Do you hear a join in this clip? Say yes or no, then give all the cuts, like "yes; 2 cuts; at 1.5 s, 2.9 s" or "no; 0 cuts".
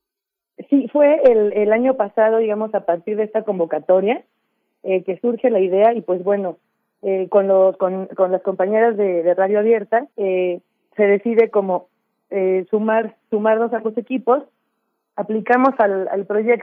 yes; 1 cut; at 10.1 s